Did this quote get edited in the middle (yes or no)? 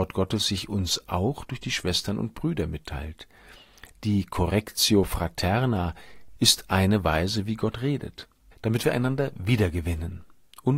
yes